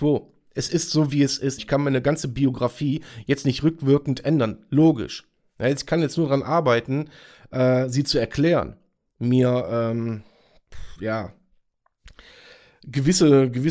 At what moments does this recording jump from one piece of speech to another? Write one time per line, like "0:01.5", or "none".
0:01.6